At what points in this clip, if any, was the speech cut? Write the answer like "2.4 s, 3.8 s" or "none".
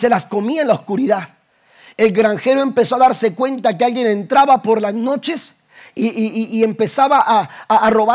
none